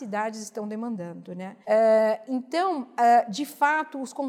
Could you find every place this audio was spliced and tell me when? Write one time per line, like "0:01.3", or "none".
0:01.6